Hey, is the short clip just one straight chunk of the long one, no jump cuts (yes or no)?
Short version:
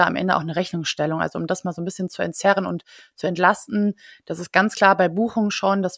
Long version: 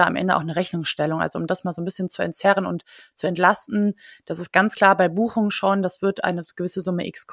yes